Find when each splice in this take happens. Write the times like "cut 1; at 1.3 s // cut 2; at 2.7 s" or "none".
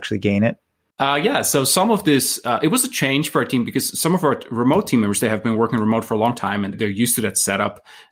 cut 1; at 6.7 s